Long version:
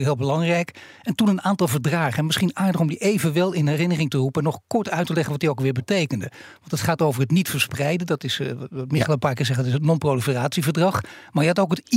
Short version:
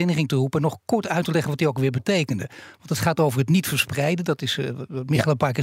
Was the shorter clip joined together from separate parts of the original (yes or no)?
no